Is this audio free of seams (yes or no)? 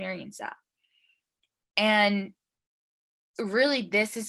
yes